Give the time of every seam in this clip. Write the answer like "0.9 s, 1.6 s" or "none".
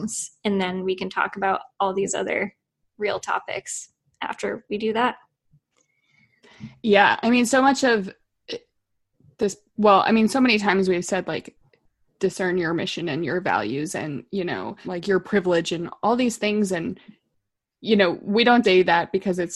14.8 s, 18.6 s